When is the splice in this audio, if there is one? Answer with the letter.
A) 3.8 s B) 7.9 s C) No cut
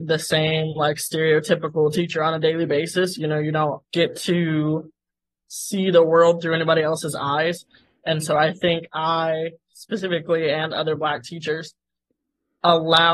A